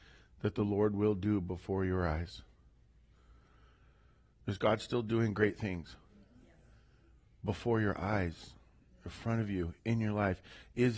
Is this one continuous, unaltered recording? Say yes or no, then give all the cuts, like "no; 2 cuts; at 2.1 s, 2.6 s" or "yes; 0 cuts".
yes; 0 cuts